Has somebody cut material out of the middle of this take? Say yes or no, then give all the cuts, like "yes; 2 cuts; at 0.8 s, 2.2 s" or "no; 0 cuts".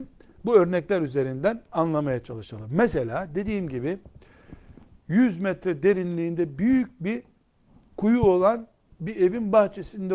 no; 0 cuts